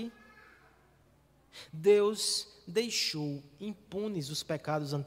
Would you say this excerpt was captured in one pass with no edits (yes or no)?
yes